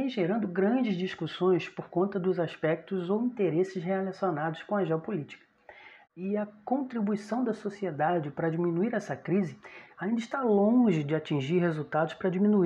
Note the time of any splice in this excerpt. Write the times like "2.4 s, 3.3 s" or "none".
6.0 s